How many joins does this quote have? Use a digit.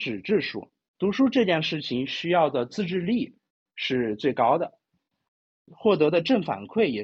1